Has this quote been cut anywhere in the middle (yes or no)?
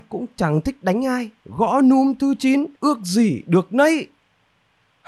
yes